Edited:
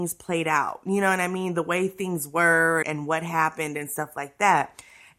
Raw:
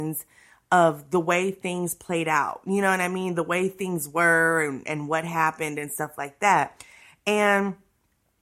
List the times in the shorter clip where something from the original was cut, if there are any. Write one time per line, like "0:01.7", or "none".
0:02.8